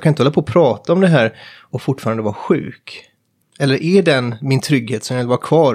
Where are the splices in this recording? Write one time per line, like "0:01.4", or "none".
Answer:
0:03.4